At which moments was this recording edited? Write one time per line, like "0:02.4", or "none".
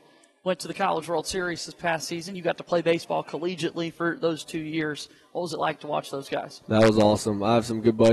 none